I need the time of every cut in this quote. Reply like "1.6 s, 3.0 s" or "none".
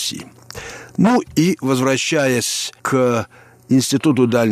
2.8 s